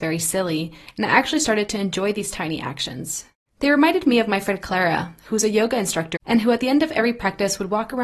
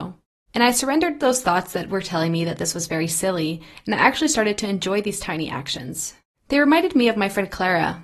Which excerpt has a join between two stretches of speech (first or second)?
first